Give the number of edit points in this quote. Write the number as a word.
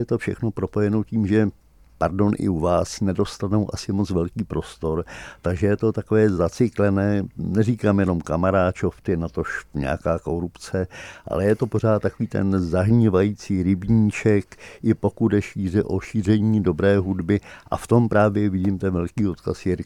zero